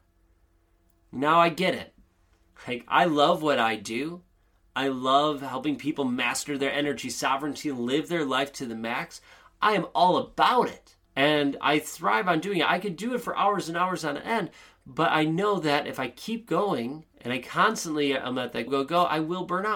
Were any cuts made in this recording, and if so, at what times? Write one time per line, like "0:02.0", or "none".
0:11.1
0:17.1
0:18.7